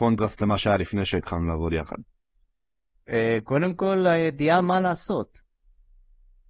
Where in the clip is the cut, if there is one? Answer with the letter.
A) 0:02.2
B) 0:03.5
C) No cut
C